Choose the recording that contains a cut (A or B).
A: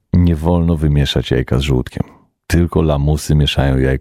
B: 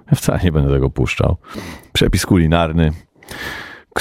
B